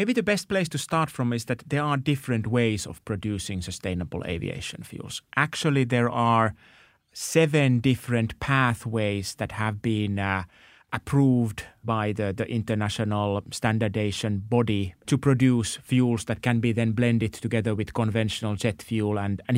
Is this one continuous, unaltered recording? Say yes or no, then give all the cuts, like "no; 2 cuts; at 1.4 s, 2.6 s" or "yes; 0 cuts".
no; 1 cut; at 15.0 s